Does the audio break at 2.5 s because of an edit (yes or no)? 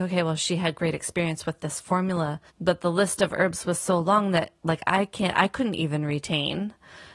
yes